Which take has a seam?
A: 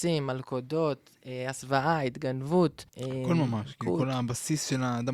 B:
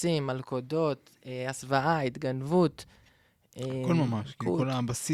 A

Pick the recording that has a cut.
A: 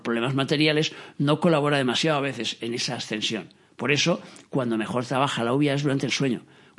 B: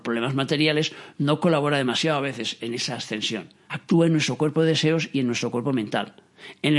B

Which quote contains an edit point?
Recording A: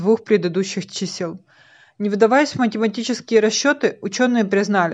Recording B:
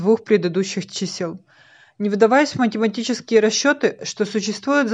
B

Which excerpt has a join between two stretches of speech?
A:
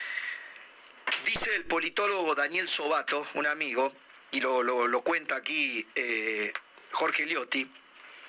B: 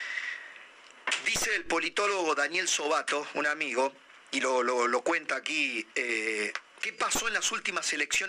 B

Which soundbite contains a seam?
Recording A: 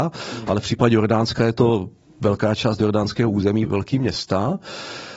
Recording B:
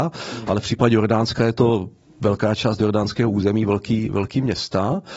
A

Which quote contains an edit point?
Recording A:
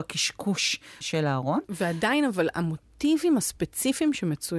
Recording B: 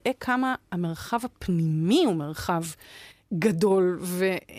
A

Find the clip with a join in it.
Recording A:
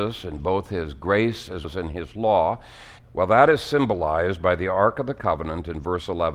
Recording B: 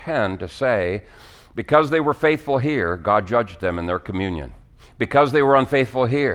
A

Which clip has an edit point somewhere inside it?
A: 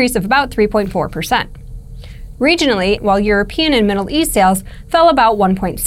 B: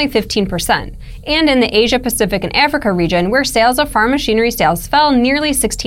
A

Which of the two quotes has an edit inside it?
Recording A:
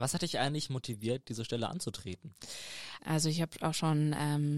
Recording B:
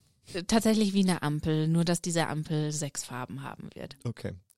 A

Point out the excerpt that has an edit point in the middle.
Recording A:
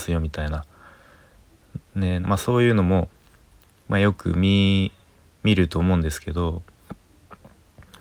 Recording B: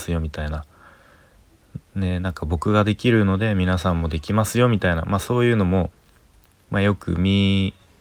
A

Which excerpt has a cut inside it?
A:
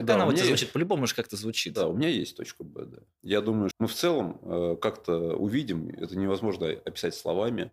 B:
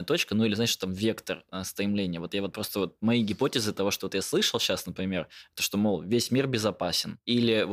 A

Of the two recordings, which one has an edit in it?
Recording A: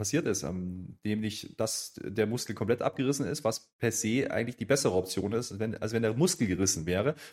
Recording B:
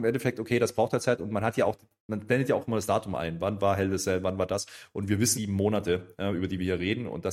B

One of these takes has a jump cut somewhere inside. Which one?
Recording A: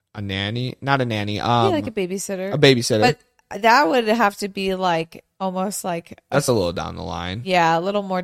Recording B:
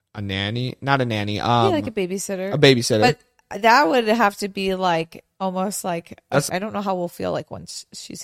B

